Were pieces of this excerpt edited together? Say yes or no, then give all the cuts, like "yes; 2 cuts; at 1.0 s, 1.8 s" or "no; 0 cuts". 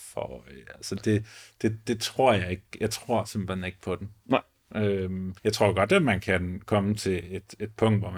yes; 1 cut; at 5.4 s